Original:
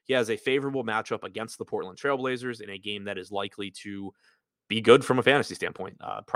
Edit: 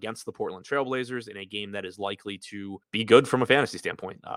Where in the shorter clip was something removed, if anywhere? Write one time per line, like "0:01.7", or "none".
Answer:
0:02.8